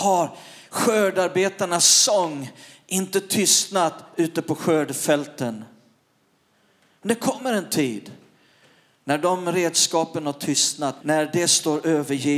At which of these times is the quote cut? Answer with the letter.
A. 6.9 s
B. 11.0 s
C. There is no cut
B